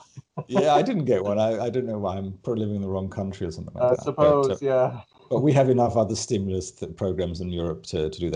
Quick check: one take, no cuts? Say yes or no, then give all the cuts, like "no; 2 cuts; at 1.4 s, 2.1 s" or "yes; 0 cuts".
yes; 0 cuts